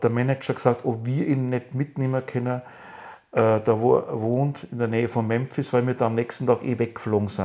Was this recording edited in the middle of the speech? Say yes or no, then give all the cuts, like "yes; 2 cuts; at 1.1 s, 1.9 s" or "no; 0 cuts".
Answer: no; 0 cuts